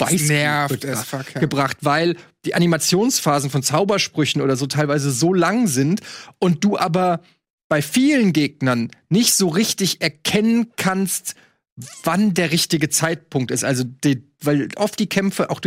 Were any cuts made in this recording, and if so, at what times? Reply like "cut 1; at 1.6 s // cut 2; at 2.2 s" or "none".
none